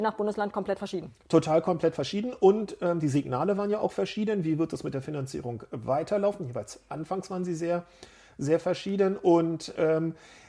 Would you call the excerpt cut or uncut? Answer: uncut